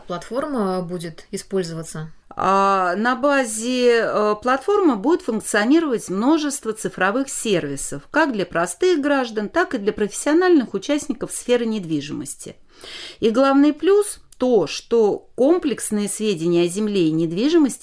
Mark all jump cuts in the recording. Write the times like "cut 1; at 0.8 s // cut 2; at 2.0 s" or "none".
none